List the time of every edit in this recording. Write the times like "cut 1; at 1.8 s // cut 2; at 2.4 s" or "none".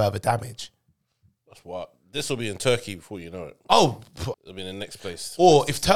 cut 1; at 4.3 s